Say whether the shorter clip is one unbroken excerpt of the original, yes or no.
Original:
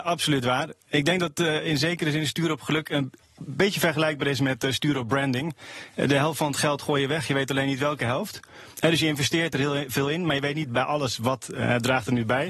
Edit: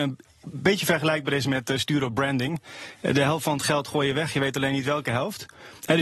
yes